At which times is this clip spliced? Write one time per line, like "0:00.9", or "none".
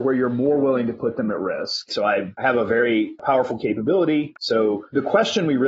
0:01.9
0:04.3